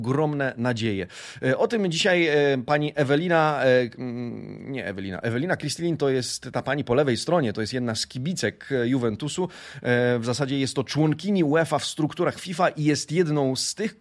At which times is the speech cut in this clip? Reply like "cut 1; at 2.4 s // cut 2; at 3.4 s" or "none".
none